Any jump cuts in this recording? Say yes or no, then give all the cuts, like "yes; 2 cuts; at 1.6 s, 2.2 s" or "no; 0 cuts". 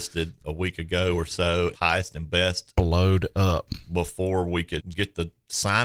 yes; 2 cuts; at 1.7 s, 4.8 s